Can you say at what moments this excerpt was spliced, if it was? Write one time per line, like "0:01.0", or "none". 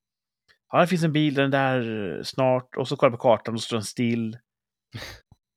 none